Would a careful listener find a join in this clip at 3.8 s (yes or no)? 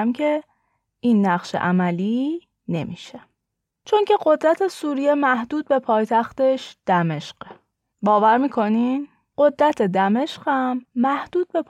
no